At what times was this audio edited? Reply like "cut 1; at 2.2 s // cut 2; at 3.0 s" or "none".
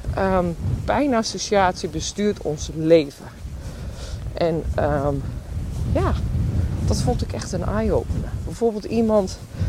none